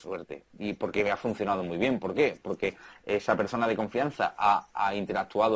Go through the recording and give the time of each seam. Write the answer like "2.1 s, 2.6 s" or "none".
none